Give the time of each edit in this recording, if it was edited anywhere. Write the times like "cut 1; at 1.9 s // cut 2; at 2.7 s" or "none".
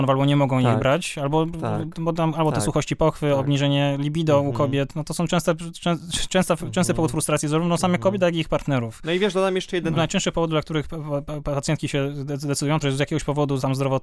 cut 1; at 9.9 s // cut 2; at 12.8 s